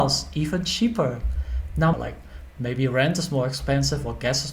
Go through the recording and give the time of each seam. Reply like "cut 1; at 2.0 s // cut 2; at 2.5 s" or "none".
cut 1; at 1.9 s